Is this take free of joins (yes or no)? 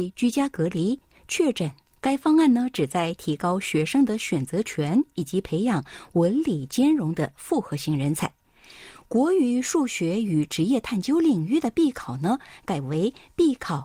no